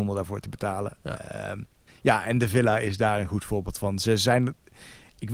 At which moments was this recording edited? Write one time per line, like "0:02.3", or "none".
0:01.9